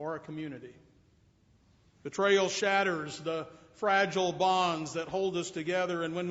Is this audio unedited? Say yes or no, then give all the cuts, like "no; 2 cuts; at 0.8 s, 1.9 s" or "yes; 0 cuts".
yes; 0 cuts